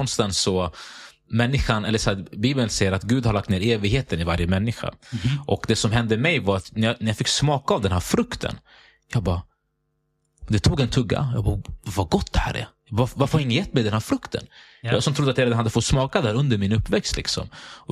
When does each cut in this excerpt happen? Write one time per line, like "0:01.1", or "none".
none